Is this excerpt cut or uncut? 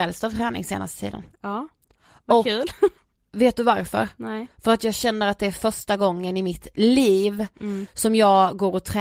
uncut